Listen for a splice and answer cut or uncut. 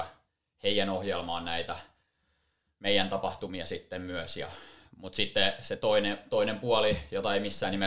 uncut